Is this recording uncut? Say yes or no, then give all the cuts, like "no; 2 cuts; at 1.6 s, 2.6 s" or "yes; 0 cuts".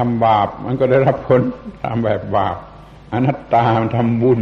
yes; 0 cuts